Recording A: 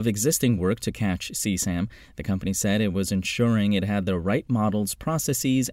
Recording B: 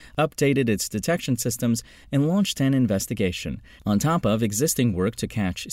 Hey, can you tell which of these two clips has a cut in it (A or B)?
B